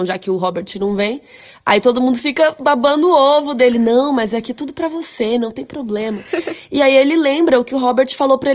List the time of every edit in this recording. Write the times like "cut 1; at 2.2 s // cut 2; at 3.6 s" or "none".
none